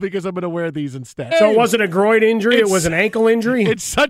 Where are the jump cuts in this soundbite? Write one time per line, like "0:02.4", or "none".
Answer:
0:01.3